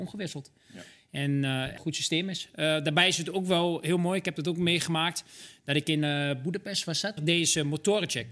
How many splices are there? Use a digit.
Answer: 2